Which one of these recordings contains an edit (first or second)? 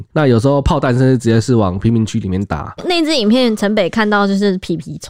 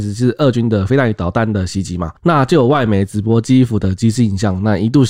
first